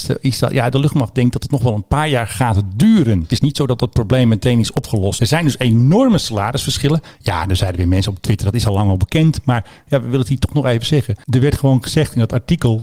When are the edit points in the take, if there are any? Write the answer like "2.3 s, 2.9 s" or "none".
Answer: none